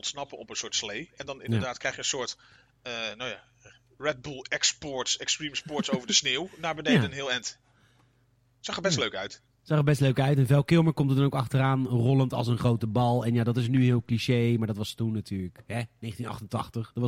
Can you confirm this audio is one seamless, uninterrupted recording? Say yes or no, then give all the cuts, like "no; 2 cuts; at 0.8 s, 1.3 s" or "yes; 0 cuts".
yes; 0 cuts